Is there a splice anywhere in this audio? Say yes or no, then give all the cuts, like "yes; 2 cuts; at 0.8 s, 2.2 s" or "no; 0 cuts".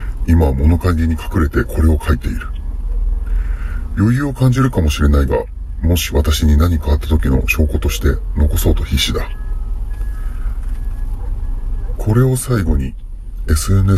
yes; 1 cut; at 12.0 s